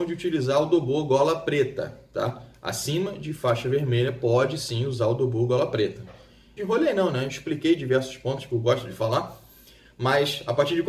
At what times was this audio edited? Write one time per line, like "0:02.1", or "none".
0:06.6